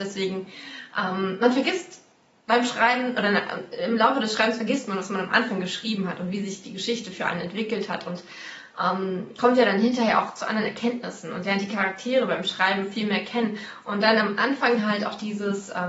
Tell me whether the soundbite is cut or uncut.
uncut